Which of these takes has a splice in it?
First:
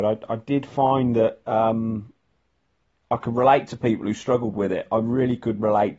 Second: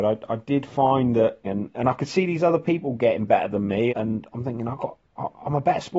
second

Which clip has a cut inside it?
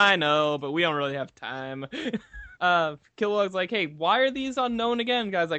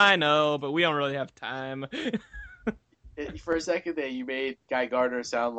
first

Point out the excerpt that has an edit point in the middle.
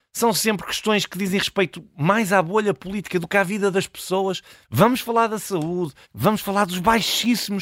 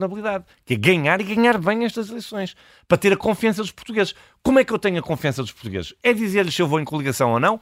first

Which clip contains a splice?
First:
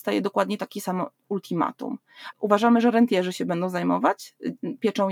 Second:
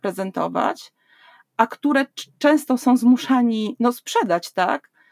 first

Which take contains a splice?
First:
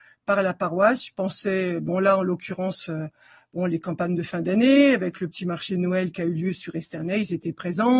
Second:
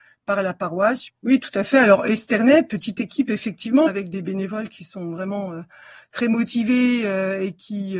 second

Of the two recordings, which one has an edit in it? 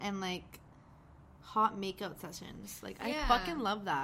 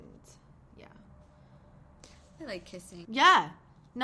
second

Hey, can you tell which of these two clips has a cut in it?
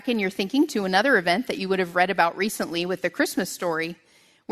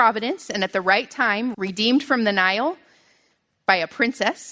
second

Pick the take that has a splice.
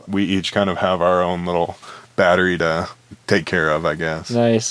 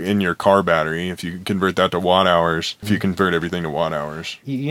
second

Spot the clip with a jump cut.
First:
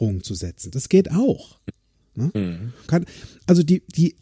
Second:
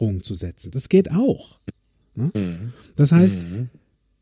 first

